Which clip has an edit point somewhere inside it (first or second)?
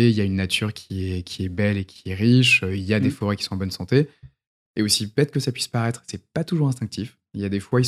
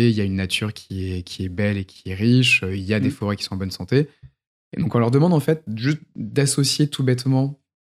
first